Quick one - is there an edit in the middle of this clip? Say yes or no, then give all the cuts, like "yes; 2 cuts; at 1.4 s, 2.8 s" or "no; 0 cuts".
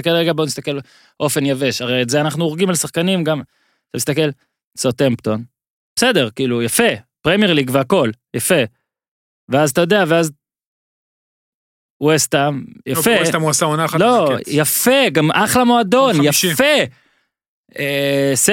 no; 0 cuts